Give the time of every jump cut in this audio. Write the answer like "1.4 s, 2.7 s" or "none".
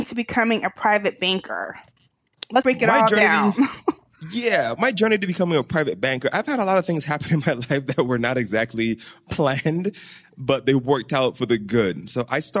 2.6 s, 4.7 s

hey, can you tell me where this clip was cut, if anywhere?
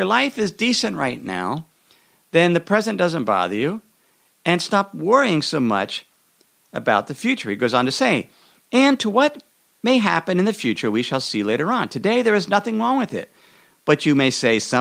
none

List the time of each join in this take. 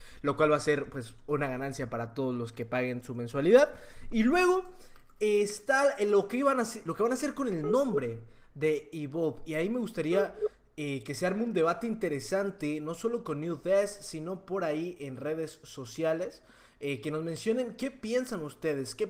6.8 s

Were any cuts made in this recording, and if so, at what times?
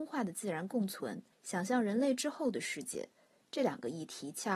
1.3 s

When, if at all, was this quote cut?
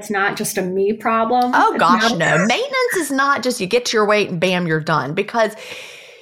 none

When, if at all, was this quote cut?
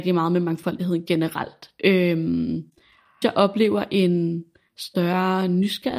3.2 s

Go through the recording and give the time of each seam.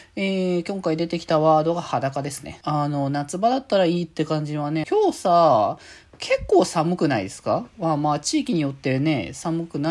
2.6 s, 4.8 s

